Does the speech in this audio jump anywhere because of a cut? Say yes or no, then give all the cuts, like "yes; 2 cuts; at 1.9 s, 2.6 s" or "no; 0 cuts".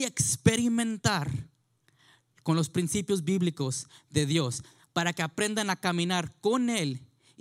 no; 0 cuts